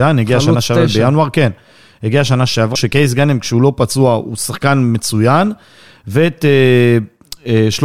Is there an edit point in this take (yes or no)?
yes